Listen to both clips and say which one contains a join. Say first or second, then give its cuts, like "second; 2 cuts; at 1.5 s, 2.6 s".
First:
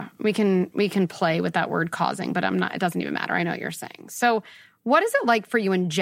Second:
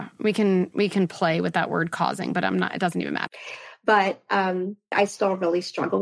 second; 2 cuts; at 3.3 s, 4.9 s